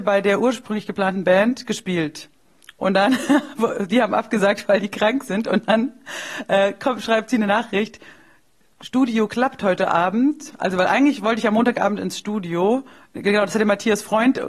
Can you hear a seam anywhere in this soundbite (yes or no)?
no